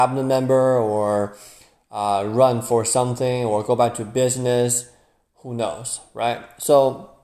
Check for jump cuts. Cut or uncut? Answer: uncut